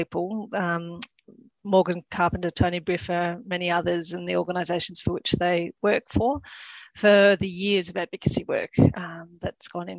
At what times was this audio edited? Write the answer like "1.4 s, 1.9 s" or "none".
none